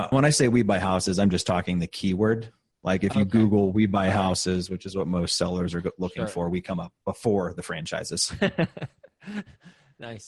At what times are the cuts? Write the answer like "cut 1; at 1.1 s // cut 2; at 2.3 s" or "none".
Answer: none